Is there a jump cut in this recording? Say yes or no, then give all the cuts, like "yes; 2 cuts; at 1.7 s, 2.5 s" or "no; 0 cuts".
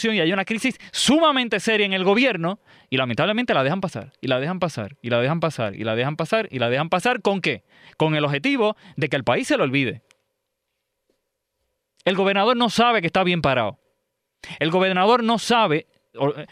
no; 0 cuts